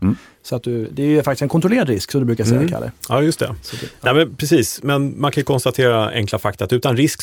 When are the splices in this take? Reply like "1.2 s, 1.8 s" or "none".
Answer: none

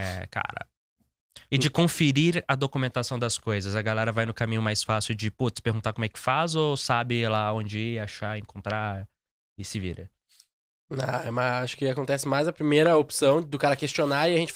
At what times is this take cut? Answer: 1.5 s

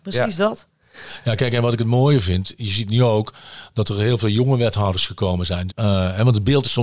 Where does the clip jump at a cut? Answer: 5.7 s

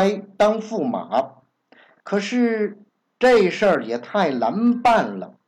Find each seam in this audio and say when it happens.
2.0 s

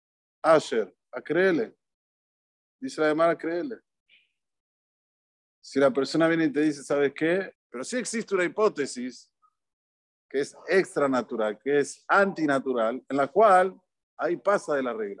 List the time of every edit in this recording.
7.6 s

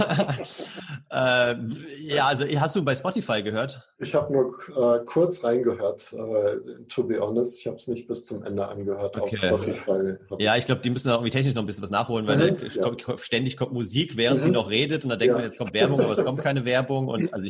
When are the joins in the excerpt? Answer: 3.9 s

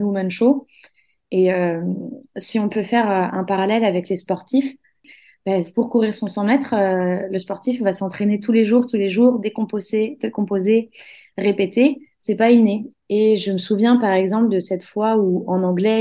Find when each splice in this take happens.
12.9 s

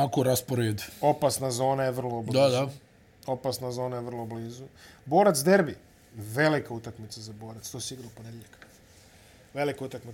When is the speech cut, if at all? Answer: none

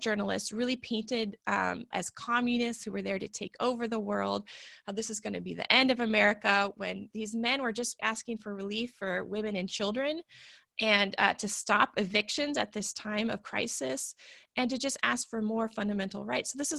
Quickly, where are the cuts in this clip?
1.9 s, 8.0 s

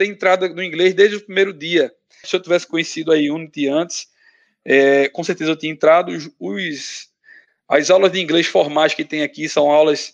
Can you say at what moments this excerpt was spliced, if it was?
2.2 s

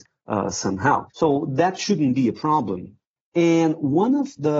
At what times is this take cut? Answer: 3.2 s

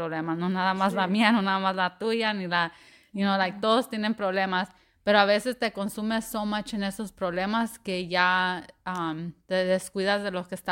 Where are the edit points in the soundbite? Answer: none

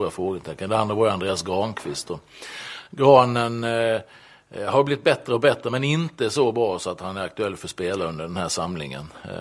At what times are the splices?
none

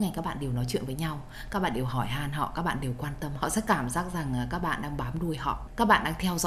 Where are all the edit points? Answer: 3.4 s

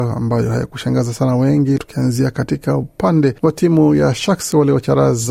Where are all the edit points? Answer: 1.8 s, 3.4 s

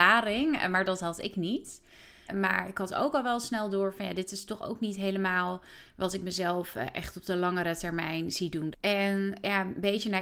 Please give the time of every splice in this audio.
2.3 s, 8.7 s

